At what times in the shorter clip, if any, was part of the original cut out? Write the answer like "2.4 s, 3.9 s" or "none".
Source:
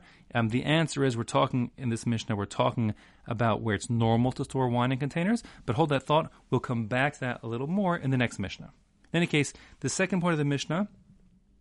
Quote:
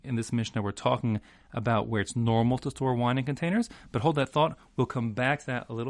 none